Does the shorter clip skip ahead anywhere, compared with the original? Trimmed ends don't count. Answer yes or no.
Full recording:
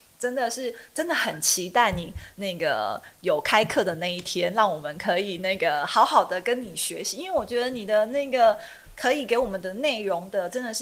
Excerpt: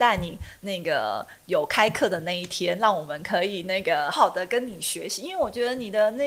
yes